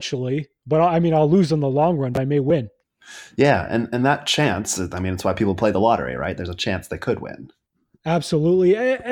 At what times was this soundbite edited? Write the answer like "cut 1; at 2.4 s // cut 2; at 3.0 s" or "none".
none